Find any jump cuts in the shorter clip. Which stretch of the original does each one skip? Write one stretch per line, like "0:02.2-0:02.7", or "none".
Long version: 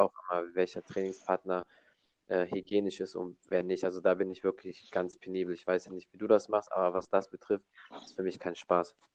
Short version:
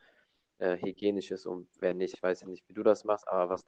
0:03.8-0:05.6